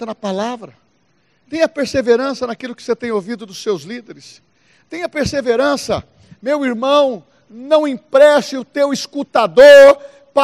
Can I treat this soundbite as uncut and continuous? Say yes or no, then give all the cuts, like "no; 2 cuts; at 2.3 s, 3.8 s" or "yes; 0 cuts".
yes; 0 cuts